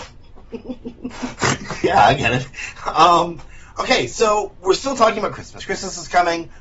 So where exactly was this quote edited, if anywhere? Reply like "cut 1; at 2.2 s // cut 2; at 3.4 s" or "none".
none